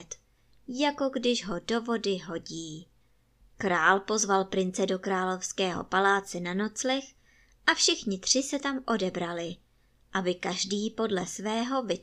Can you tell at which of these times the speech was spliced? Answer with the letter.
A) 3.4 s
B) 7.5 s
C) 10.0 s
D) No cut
A